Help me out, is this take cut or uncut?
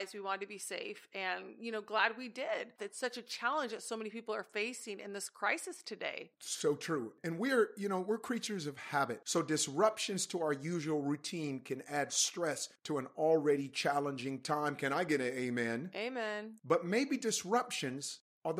cut